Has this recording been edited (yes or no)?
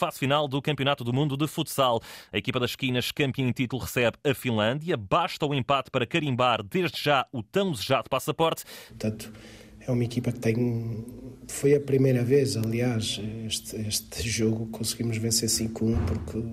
yes